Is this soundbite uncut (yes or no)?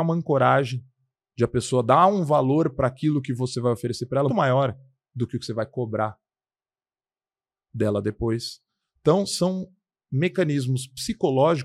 no